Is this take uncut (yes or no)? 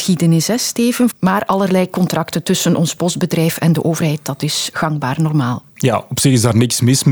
no